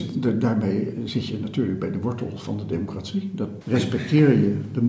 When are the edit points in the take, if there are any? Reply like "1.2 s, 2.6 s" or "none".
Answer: 3.6 s